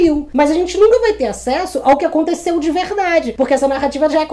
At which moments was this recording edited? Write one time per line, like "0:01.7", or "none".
none